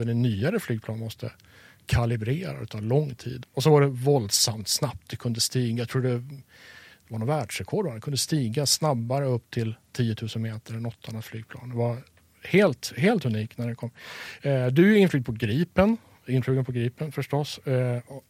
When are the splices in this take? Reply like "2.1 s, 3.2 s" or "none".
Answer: 3.4 s